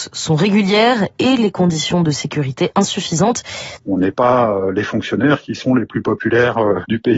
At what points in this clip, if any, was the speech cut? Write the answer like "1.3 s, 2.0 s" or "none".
3.8 s

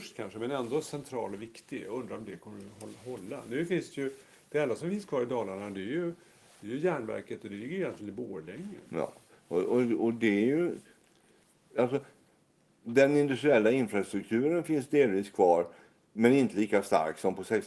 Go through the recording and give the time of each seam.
none

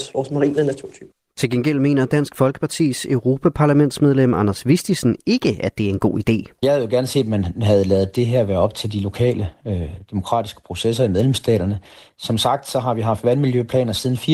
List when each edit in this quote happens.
none

